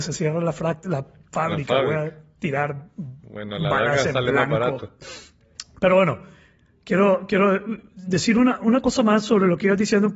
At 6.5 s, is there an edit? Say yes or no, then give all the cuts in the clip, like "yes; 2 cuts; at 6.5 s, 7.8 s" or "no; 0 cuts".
no; 0 cuts